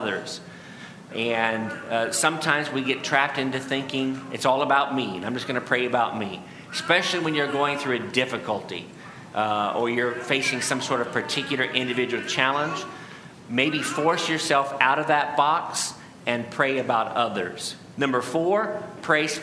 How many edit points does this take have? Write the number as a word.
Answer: one